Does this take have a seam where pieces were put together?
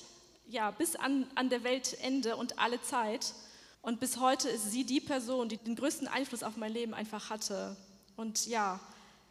yes; 2 cuts; at 3.7 s, 5.6 s

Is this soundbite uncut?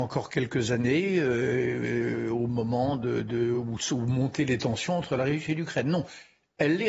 yes; 0 cuts

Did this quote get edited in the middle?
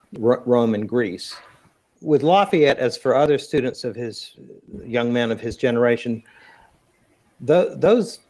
no; 0 cuts

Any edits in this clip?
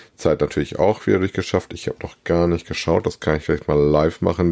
no; 0 cuts

